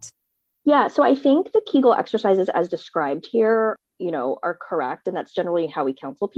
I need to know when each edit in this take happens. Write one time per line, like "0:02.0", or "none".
none